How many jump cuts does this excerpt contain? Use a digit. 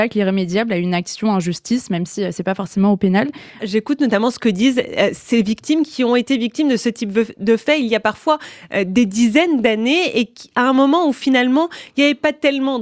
1